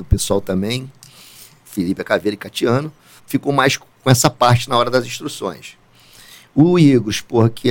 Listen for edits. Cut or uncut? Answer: cut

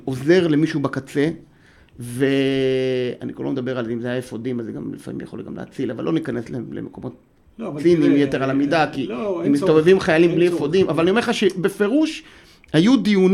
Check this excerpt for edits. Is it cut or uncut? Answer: uncut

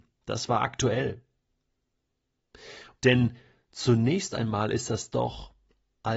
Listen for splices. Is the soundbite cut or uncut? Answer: cut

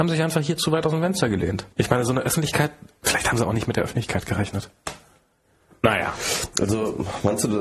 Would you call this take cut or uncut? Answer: cut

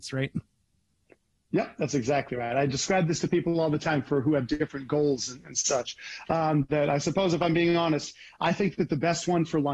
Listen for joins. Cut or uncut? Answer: uncut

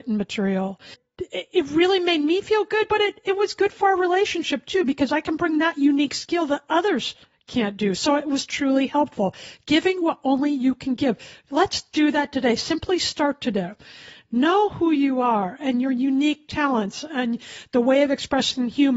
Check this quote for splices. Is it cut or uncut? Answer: uncut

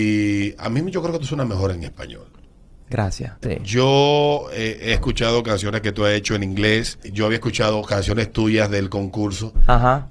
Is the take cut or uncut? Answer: cut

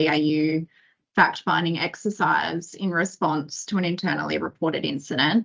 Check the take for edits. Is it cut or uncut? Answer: uncut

